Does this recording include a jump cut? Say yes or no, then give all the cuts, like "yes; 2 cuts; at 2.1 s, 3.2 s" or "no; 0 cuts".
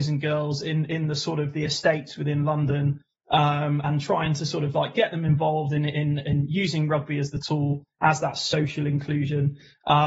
no; 0 cuts